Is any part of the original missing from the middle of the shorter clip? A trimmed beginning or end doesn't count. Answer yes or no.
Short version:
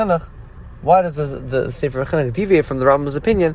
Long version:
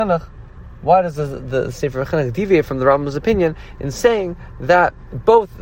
no